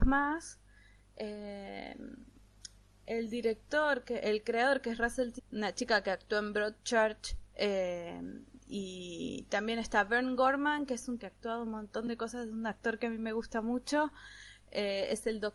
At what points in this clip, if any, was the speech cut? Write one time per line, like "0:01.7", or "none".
0:05.4
0:11.2